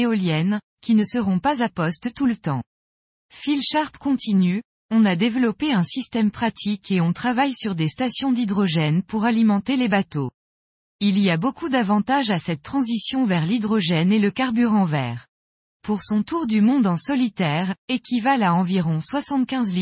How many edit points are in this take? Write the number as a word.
three